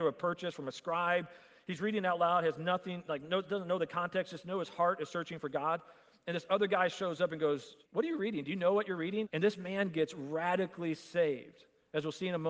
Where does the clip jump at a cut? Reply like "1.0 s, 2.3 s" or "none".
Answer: 7.8 s, 9.2 s